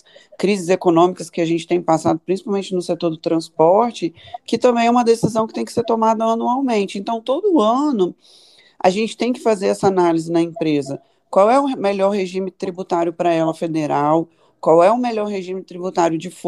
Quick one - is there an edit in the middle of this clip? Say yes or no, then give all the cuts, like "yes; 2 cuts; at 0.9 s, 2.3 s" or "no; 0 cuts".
no; 0 cuts